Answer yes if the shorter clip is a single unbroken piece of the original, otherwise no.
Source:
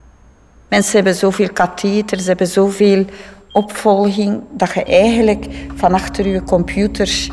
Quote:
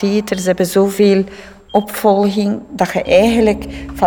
yes